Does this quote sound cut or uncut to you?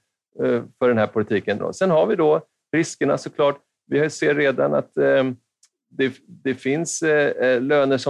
cut